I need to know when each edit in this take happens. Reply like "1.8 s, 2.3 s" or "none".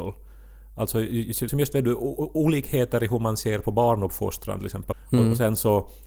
1.5 s, 4.9 s